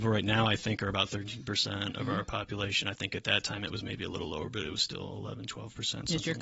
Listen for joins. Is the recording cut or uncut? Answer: uncut